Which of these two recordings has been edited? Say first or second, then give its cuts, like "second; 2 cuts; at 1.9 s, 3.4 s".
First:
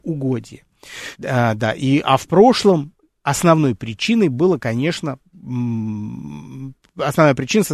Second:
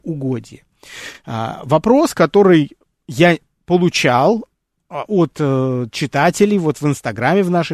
first; 1 cut; at 1.1 s